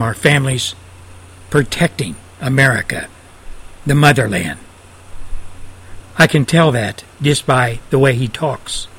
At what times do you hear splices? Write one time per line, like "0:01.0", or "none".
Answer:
0:06.0